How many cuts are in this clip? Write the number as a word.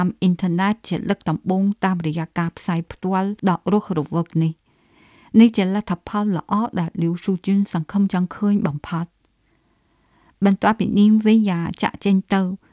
zero